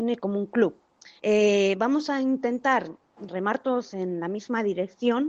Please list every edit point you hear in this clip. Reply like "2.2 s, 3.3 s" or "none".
1.2 s, 3.3 s